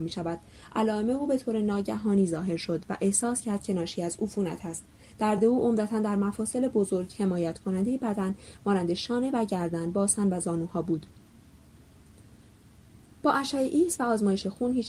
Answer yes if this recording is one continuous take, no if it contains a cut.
yes